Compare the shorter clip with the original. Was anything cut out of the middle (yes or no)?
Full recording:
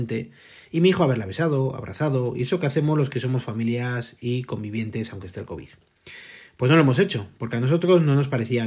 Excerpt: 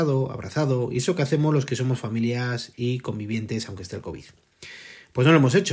no